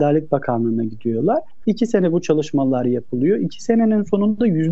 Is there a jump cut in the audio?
yes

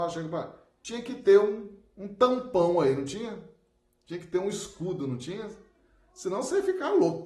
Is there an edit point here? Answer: no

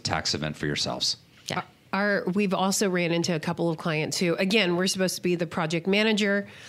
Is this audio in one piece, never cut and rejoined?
yes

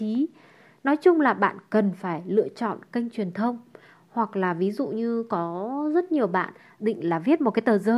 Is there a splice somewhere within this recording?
yes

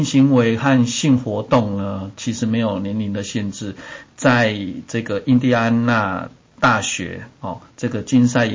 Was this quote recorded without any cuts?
yes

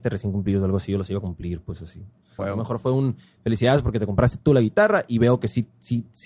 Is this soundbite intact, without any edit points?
no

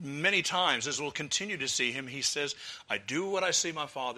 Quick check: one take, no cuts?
yes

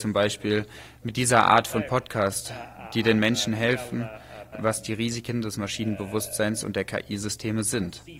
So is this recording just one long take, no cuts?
no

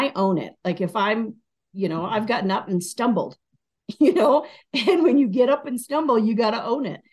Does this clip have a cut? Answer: no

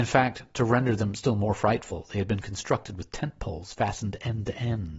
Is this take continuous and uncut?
yes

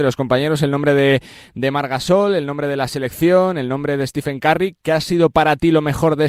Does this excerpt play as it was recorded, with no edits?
yes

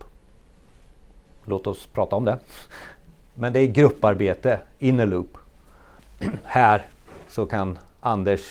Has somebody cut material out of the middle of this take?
yes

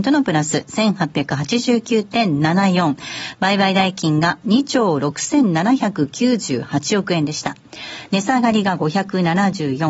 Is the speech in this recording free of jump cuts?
no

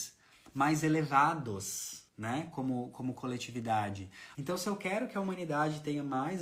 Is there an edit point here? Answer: yes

